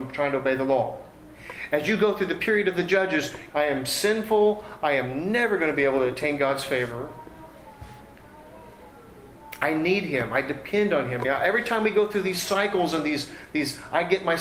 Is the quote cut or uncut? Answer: cut